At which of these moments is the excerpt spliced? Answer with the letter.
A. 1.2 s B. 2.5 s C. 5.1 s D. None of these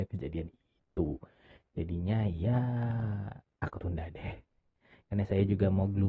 D